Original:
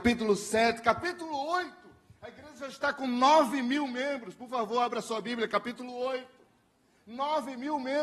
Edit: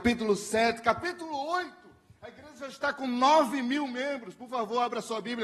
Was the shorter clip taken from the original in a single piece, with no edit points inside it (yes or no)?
yes